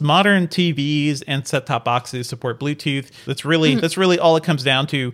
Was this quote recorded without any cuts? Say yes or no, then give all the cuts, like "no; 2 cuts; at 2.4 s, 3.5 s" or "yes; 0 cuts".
no; 1 cut; at 3.2 s